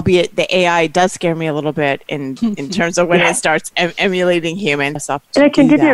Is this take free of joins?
no; 1 cut; at 5.0 s

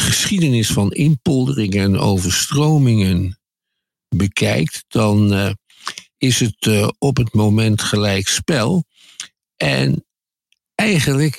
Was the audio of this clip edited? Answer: no; 0 cuts

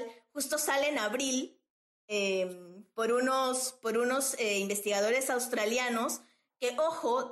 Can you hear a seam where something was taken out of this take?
no; 0 cuts

